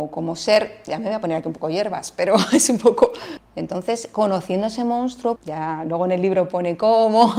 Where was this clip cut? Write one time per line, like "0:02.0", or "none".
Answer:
0:03.4
0:05.4